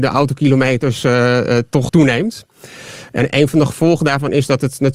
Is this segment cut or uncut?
cut